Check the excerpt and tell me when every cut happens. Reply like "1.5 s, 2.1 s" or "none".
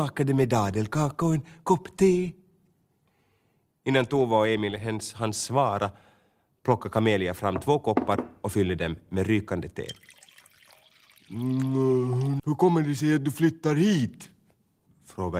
12.4 s